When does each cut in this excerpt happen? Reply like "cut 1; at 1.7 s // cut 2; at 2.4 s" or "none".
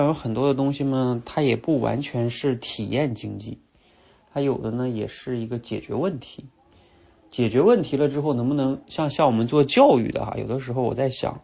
none

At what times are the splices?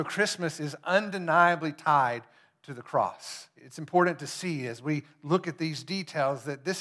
cut 1; at 3.6 s

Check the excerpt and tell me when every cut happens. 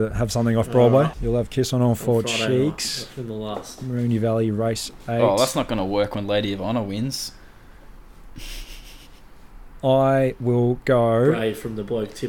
cut 1; at 1.1 s

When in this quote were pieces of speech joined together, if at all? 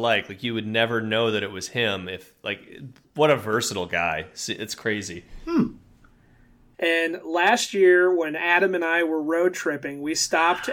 cut 1; at 6.7 s

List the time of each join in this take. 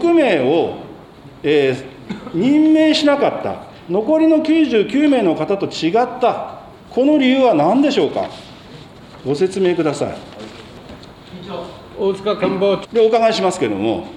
cut 1; at 6.8 s // cut 2; at 12.8 s

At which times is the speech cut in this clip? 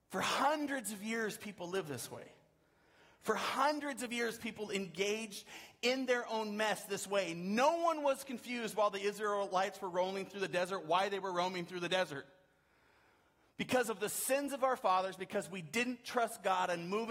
none

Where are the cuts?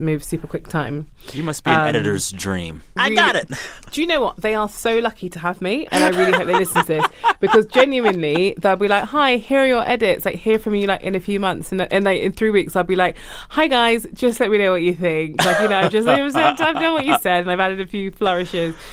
cut 1; at 3.0 s

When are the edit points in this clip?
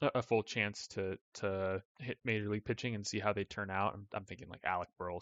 cut 1; at 1.9 s

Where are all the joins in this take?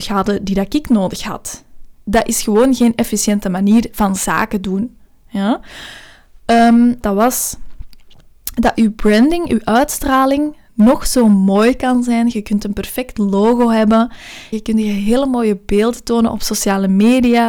cut 1; at 7.0 s // cut 2; at 14.5 s

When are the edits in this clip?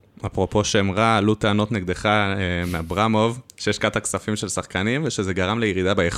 none

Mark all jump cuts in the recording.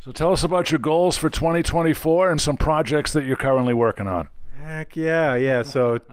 cut 1; at 2.4 s

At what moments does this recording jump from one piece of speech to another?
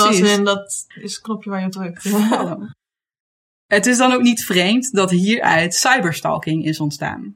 cut 1; at 0.9 s

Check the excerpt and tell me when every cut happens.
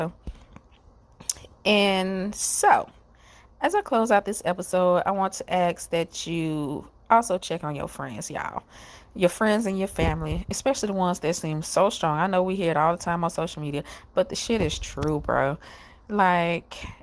none

